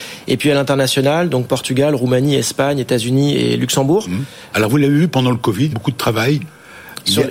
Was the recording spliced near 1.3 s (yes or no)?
no